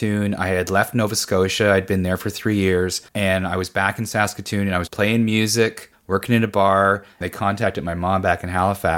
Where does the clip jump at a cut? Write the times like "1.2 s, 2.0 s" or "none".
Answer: 3.1 s, 4.9 s, 7.2 s